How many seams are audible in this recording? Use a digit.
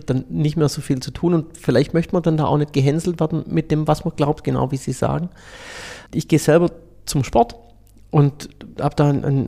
1